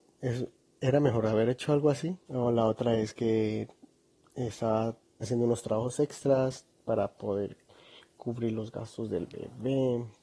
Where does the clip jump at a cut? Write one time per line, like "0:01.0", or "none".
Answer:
0:02.3
0:05.2